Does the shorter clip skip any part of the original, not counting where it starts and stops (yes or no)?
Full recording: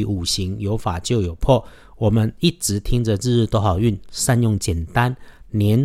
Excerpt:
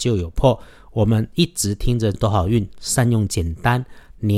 yes